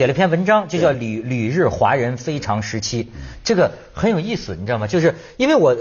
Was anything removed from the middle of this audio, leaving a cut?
no; 0 cuts

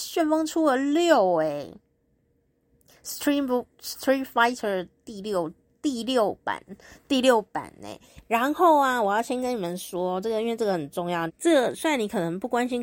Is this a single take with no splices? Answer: no; 1 cut; at 11.3 s

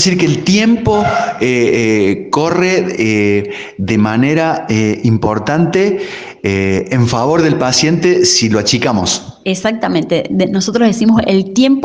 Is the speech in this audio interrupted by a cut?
no; 0 cuts

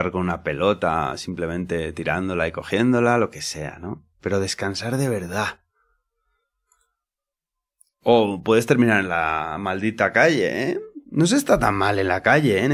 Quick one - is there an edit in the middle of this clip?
no; 0 cuts

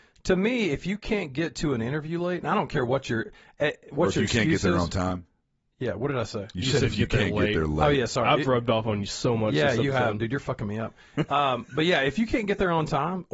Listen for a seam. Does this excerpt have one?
no; 0 cuts

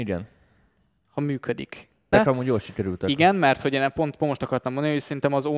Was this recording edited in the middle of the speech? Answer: yes; 1 cut; at 2.1 s

